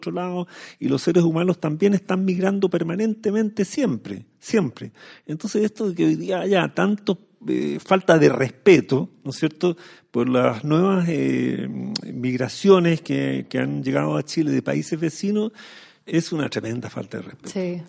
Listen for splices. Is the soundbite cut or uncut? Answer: uncut